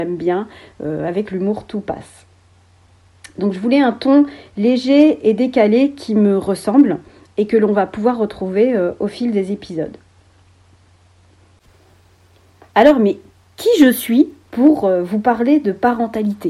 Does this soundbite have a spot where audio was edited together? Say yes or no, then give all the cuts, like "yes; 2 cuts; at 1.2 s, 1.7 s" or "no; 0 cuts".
no; 0 cuts